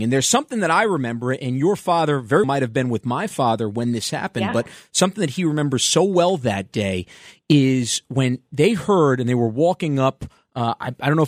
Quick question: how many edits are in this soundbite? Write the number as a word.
one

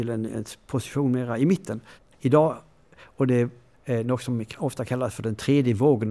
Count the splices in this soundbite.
two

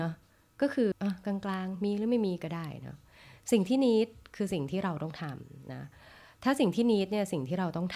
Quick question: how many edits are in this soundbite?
one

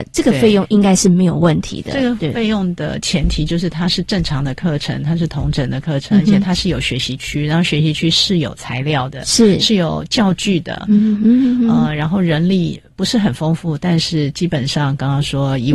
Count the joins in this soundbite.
one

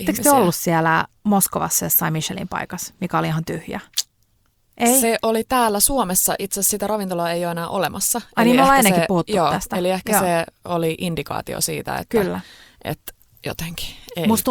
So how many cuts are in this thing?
zero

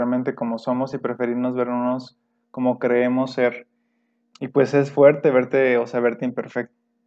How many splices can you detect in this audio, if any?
zero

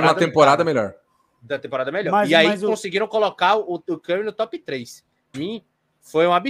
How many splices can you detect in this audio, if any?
one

